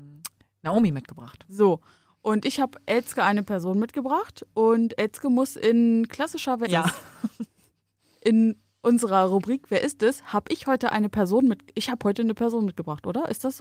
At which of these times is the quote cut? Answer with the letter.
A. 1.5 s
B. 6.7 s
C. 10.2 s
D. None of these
B